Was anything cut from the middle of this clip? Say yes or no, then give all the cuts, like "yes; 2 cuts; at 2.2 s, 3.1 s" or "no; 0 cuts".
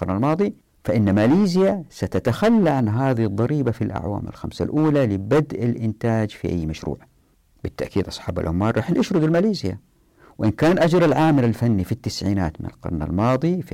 no; 0 cuts